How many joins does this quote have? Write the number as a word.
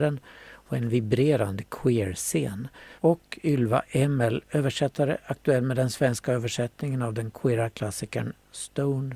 one